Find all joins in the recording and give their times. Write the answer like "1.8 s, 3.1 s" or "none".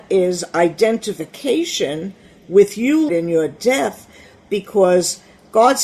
3.1 s